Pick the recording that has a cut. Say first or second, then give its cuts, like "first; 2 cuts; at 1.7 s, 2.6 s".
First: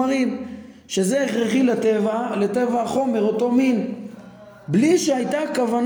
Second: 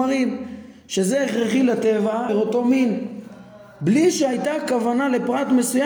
second; 1 cut; at 2.3 s